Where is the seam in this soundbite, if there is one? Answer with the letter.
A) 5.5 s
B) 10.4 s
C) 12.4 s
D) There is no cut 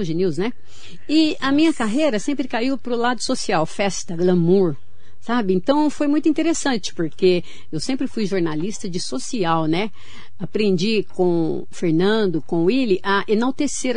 D